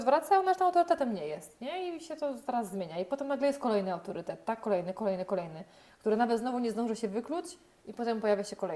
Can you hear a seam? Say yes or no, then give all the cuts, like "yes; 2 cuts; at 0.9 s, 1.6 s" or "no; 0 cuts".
no; 0 cuts